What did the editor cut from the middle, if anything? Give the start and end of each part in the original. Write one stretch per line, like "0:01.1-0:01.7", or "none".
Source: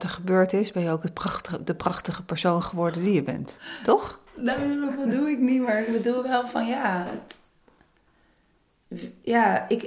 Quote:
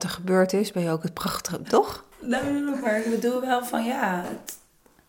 0:01.6-0:03.8
0:05.0-0:05.6